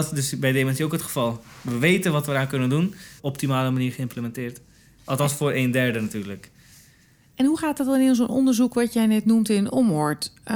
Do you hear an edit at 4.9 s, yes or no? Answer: no